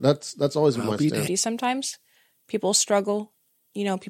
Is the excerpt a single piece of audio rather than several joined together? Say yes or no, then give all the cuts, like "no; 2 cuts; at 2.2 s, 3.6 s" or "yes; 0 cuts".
no; 1 cut; at 1.3 s